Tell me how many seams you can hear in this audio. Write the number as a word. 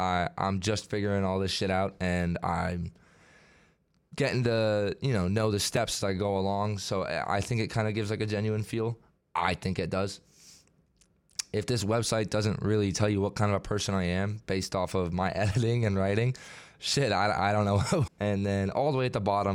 one